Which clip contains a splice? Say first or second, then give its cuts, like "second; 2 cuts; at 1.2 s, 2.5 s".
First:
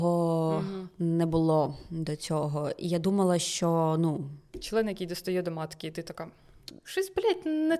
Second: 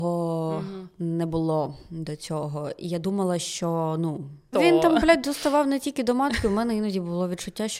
second; 1 cut; at 4.5 s